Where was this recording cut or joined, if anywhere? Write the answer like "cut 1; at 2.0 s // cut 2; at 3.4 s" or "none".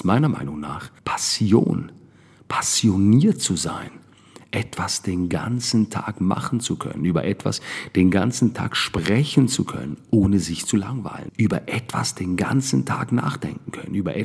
cut 1; at 1.0 s // cut 2; at 11.3 s